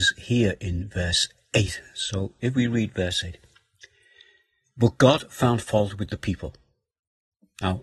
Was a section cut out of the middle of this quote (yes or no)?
no